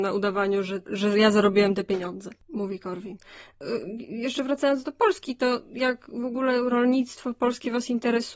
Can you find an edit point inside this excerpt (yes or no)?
no